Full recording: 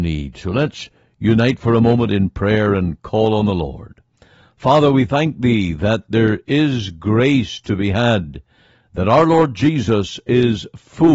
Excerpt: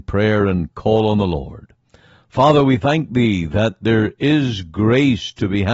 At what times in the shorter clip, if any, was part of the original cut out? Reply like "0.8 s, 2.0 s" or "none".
none